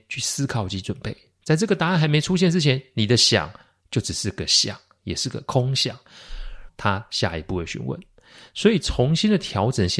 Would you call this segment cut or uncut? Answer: cut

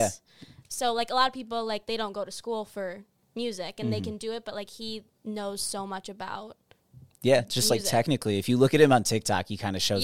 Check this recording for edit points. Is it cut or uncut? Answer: uncut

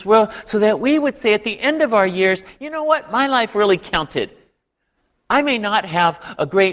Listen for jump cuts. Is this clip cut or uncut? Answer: uncut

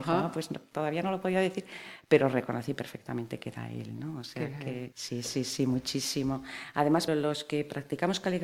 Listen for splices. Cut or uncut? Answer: cut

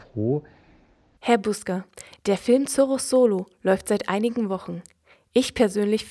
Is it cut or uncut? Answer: cut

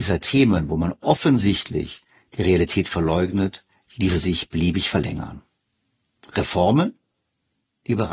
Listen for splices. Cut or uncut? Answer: uncut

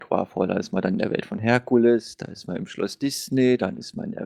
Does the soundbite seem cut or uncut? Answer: uncut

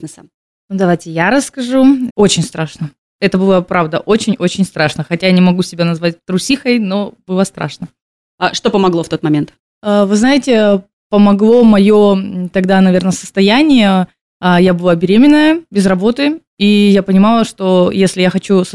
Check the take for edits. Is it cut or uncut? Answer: cut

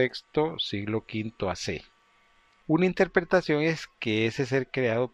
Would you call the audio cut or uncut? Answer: cut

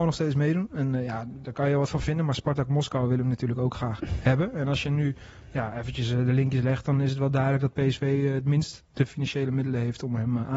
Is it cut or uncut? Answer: uncut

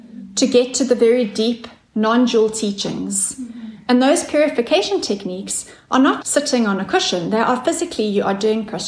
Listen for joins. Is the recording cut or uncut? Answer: cut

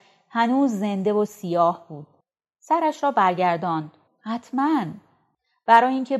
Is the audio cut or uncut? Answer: cut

